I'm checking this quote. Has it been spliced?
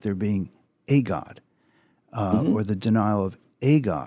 no; 0 cuts

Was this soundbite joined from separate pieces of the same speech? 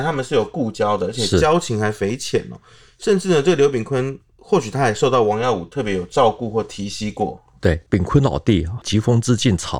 yes; 1 cut; at 7.9 s

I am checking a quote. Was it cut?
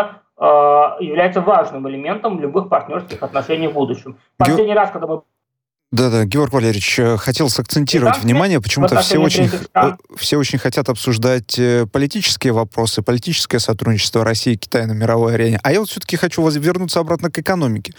no; 0 cuts

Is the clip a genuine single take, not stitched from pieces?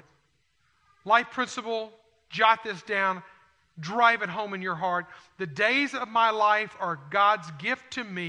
yes; 0 cuts

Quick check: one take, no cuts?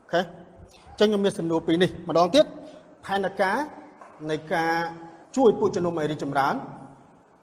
no; 1 cut; at 5.2 s

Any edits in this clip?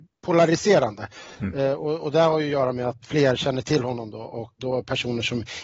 yes; 2 cuts; at 3.0 s, 4.6 s

